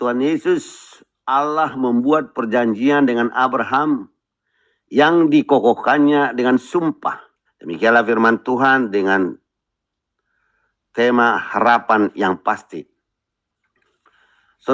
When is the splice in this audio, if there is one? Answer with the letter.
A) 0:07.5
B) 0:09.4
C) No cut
A